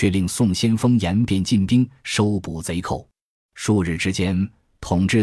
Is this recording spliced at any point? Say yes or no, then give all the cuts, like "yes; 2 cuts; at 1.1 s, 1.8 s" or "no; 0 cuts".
yes; 1 cut; at 3.5 s